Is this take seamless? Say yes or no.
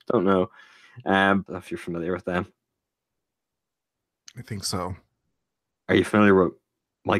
no